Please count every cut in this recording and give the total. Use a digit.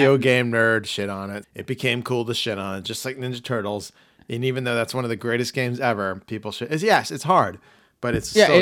1